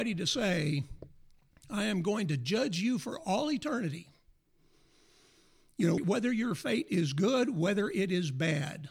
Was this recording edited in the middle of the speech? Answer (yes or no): yes